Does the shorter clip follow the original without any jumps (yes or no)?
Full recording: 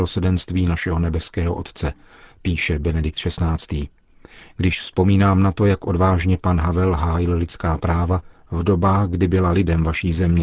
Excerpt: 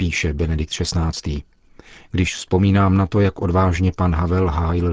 yes